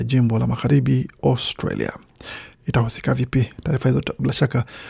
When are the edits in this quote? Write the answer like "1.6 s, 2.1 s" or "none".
2.5 s